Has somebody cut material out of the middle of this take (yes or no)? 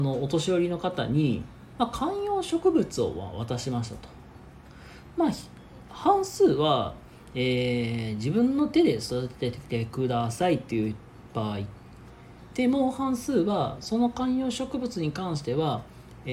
no